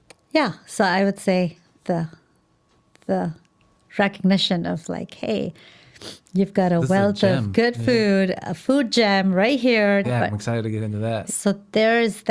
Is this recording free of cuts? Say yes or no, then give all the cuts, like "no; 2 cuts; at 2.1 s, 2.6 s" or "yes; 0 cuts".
no; 2 cuts; at 10.0 s, 11.3 s